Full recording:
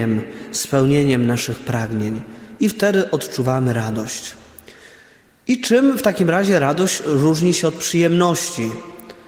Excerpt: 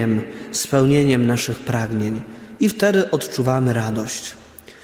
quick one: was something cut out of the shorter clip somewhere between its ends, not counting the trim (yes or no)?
no